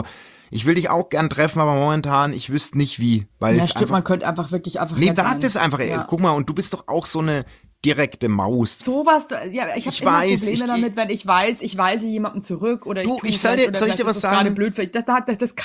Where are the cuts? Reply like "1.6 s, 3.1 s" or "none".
5.2 s, 8.8 s